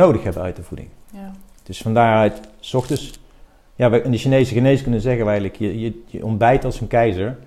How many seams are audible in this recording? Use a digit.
0